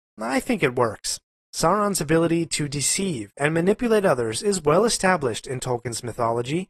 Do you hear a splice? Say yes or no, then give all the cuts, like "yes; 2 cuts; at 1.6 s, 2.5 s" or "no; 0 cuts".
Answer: yes; 1 cut; at 1.5 s